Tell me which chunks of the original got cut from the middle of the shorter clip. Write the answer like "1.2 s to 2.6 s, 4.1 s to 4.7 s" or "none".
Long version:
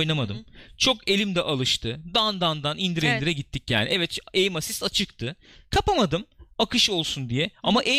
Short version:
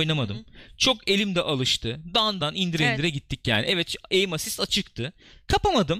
2.4 s to 2.6 s

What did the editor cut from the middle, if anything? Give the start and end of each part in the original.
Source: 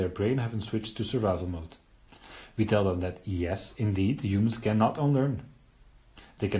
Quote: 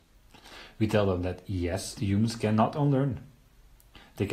3.7 s to 4.2 s

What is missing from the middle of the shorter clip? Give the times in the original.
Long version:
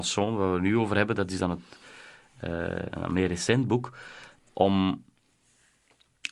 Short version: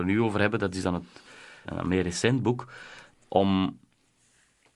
2.2 s to 2.9 s

